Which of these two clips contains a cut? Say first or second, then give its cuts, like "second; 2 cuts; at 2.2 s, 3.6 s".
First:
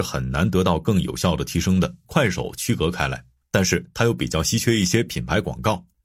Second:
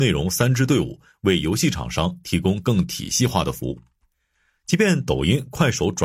first; 2 cuts; at 2.0 s, 3.5 s